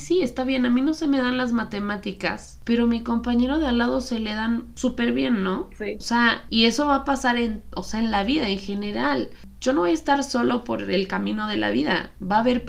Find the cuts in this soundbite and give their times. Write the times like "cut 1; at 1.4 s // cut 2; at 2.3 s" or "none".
none